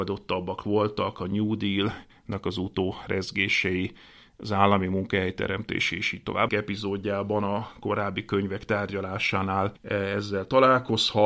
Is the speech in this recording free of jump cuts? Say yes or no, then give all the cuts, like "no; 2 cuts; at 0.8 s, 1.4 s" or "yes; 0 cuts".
no; 2 cuts; at 6.5 s, 9.8 s